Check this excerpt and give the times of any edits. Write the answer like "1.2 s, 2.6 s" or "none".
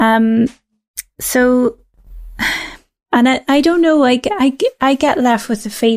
3.1 s